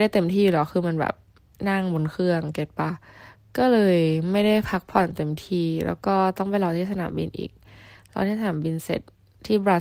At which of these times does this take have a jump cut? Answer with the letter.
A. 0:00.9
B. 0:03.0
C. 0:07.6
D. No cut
D